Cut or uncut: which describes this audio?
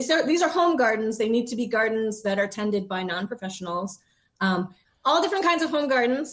uncut